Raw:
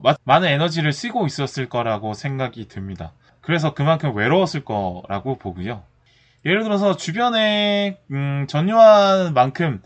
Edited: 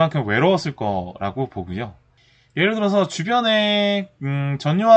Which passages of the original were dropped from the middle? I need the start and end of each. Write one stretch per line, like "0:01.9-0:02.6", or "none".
none

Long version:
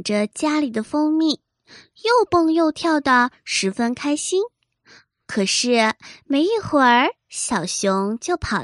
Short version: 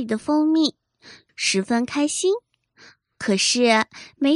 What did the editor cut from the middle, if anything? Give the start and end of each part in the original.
0:01.9-0:03.4

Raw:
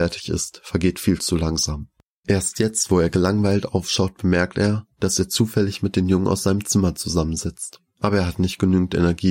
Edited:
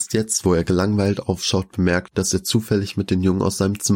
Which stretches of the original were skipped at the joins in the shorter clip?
0:04.5-0:04.9

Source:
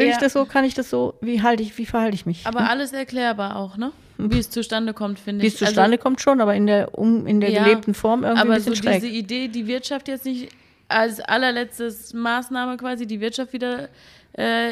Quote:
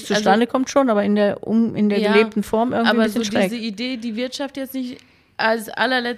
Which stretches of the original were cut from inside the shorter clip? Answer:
none

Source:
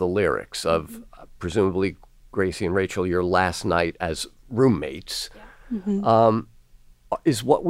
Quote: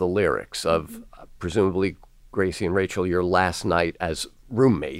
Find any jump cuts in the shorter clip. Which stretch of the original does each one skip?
none

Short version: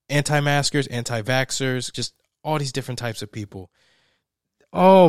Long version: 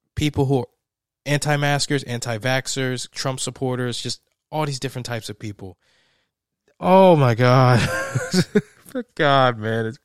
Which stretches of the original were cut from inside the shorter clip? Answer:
0:03.1-0:04.0

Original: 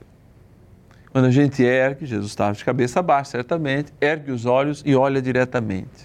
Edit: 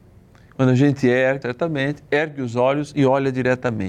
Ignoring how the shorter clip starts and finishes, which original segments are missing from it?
0:02.0-0:03.3

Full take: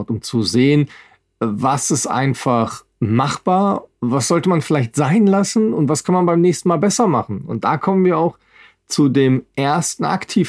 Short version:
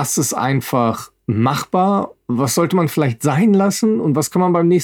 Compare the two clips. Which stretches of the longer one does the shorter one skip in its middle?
none

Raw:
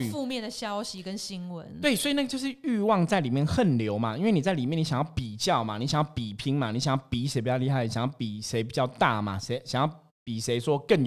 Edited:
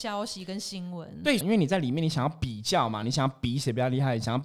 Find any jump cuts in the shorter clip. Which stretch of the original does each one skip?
0:02.0-0:04.1
0:05.8-0:06.7

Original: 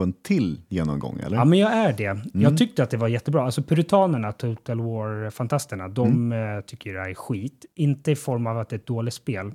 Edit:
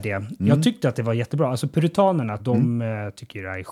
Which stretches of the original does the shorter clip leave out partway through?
0:04.3-0:05.9

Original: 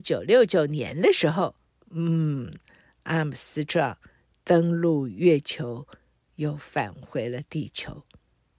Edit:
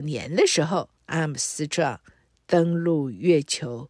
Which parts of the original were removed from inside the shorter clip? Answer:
0:01.6-0:02.9

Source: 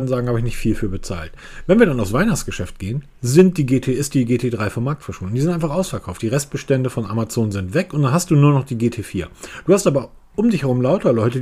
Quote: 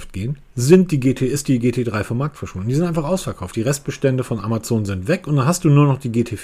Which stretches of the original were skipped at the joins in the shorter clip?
none

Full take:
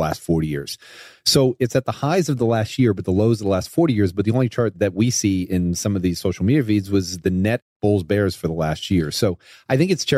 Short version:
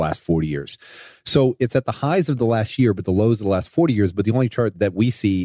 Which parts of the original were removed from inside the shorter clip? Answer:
none

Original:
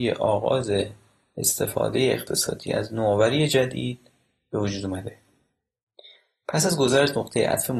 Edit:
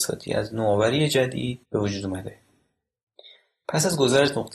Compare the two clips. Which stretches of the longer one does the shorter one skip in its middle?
0:04.0-0:04.4

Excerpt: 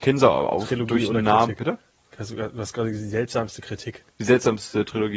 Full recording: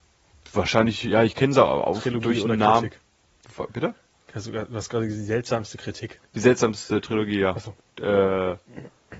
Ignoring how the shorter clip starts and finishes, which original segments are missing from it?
0:02.9-0:03.7

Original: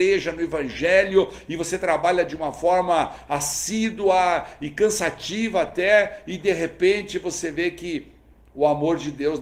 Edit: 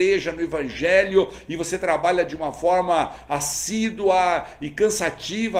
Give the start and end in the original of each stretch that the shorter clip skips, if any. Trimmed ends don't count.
none

